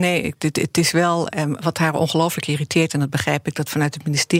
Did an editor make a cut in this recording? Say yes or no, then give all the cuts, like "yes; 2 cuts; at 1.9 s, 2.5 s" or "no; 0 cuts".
yes; 1 cut; at 1.3 s